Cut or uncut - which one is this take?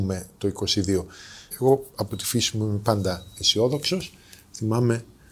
cut